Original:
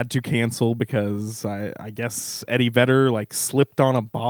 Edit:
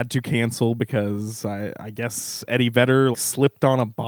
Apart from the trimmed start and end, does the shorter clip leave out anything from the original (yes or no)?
yes